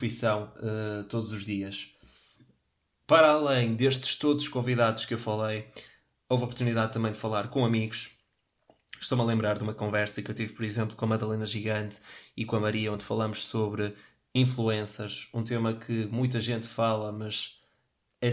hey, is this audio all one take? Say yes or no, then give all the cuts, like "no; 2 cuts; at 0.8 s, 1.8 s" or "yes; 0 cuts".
yes; 0 cuts